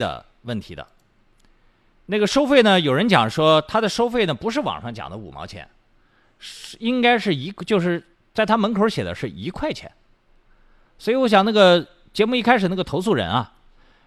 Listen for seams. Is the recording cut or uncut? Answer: uncut